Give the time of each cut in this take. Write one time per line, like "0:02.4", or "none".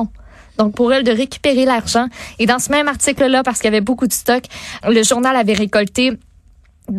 0:04.8